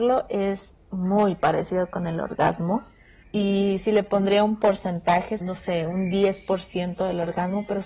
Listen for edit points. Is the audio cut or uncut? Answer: cut